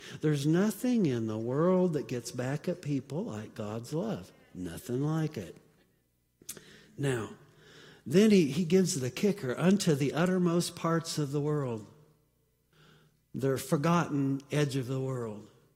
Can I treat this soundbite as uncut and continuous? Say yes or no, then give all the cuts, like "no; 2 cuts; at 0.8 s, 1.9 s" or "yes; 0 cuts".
yes; 0 cuts